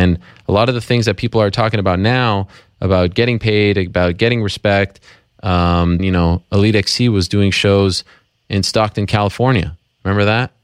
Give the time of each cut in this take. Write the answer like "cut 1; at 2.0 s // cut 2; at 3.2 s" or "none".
cut 1; at 6.0 s